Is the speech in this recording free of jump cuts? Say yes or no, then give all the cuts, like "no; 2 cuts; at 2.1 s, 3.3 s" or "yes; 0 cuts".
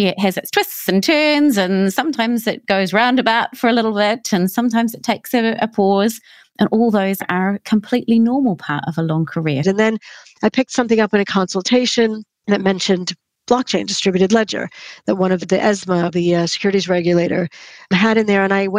no; 1 cut; at 9.6 s